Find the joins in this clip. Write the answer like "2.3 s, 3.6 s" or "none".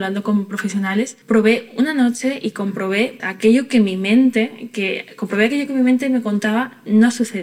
1.2 s, 3.2 s